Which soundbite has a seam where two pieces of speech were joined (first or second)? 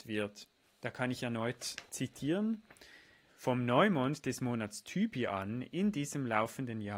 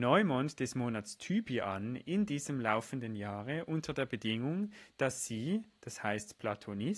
first